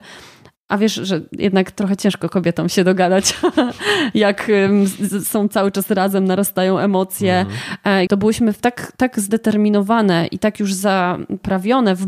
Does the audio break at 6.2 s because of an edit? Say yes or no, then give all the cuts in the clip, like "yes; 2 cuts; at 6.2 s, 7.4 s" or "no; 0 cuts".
no; 1 cut; at 8.1 s